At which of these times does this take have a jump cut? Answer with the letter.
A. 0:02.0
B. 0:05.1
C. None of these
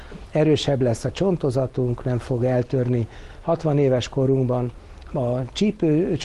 B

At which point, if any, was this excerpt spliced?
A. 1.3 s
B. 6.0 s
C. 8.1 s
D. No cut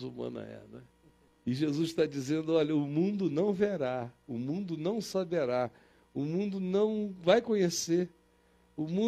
A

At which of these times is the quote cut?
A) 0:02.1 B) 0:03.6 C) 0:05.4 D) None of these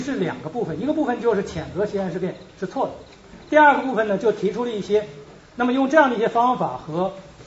C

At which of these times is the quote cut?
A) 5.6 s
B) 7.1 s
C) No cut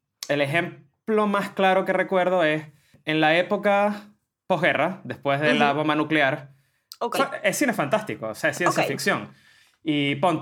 B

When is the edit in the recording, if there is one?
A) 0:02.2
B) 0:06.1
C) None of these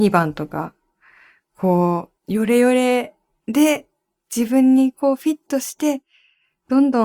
A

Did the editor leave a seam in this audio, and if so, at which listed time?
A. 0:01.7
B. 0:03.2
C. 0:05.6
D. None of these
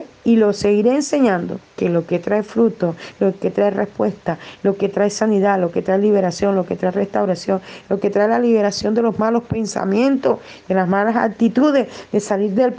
A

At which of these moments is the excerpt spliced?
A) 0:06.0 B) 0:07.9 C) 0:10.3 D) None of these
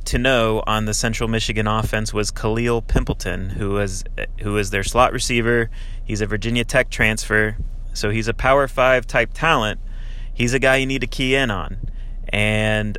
D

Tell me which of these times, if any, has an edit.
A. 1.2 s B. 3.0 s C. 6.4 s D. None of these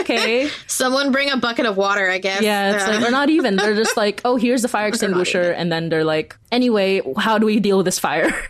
C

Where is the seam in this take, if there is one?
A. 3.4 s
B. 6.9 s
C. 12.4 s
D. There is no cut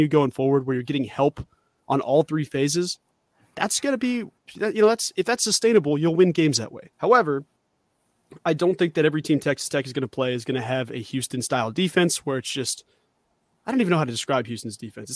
B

